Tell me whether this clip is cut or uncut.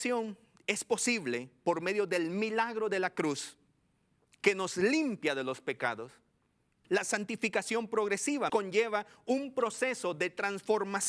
cut